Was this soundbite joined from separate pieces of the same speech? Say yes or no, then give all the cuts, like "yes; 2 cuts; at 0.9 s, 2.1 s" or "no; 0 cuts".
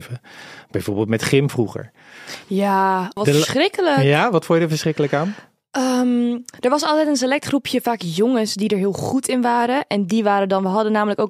yes; 1 cut; at 3.2 s